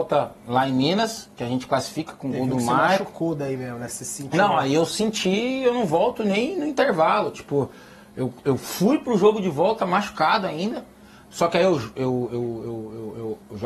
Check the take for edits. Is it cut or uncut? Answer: uncut